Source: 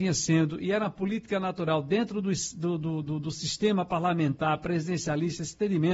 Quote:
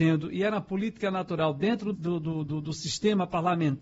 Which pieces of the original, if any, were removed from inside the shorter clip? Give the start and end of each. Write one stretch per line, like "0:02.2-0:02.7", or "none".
0:02.2-0:02.5